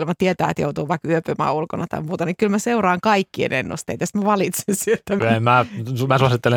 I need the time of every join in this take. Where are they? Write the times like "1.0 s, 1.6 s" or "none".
5.2 s